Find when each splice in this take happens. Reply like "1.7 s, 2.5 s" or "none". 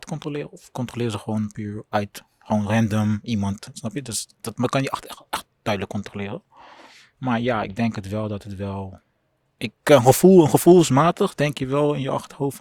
none